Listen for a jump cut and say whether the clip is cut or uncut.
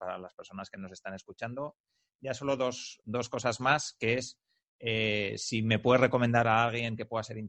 uncut